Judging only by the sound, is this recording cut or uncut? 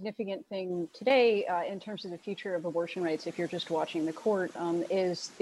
uncut